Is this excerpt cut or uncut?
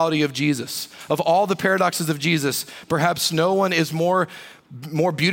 uncut